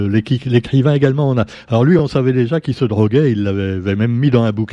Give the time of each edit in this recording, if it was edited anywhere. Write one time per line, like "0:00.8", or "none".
none